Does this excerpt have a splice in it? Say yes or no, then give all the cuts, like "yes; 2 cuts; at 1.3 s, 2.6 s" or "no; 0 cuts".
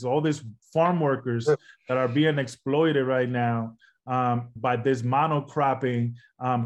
yes; 1 cut; at 4.6 s